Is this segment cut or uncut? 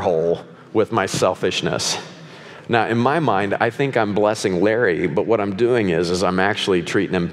uncut